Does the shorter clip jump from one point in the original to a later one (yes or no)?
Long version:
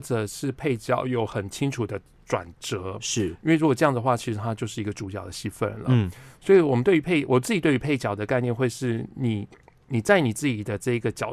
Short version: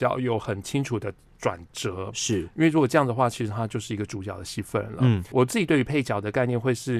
yes